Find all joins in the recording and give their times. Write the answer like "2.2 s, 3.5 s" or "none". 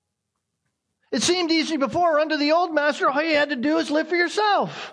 1.0 s